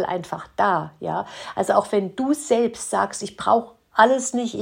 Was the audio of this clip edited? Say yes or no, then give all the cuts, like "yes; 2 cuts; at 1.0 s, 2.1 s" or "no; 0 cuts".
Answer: no; 0 cuts